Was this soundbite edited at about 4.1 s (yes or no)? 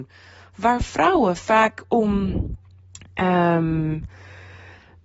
no